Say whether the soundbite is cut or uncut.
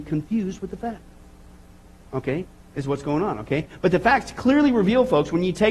uncut